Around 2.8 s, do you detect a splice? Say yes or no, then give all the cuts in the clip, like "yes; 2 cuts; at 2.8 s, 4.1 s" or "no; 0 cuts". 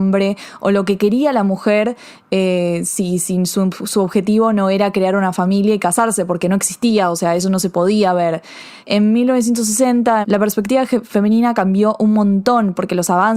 no; 2 cuts; at 8.8 s, 10.2 s